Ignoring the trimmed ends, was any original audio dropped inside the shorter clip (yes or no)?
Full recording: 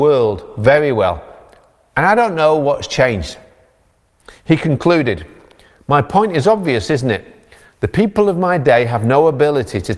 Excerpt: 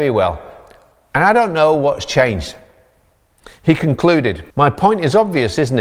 yes